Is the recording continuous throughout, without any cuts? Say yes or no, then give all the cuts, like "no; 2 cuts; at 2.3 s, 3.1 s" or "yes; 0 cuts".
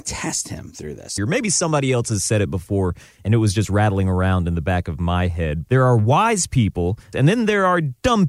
no; 3 cuts; at 1.2 s, 5.6 s, 7.1 s